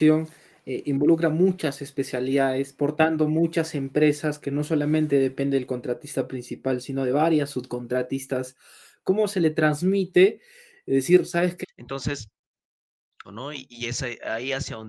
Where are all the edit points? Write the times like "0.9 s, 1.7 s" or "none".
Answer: 11.6 s, 13.2 s